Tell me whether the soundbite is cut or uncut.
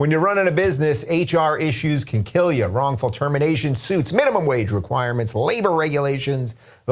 uncut